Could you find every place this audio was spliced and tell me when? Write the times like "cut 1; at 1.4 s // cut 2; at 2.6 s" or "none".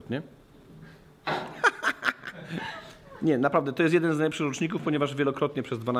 none